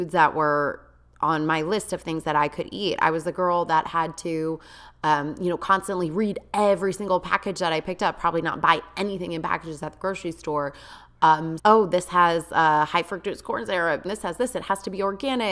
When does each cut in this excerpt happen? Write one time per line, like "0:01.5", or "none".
0:11.6
0:14.0